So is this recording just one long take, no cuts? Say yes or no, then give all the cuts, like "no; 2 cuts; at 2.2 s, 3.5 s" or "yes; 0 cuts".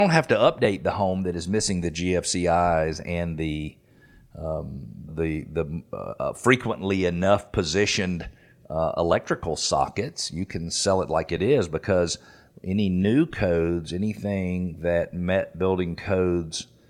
no; 1 cut; at 5.1 s